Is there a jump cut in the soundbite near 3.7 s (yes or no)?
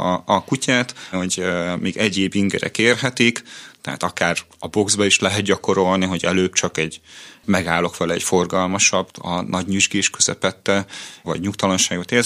no